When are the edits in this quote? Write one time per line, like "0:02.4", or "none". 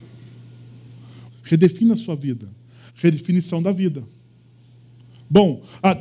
0:01.3
0:02.9